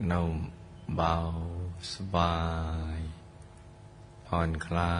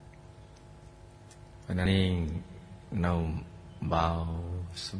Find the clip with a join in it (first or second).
second